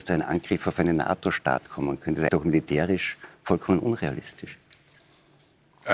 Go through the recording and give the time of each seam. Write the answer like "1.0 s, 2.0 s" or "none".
2.3 s